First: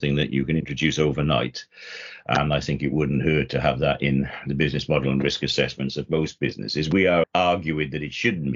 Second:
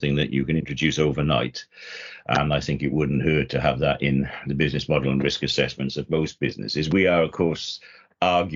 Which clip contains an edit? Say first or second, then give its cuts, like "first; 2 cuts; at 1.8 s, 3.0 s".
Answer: first; 1 cut; at 7.2 s